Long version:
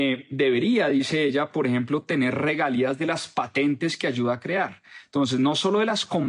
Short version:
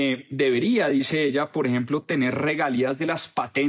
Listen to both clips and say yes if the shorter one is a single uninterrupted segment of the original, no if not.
yes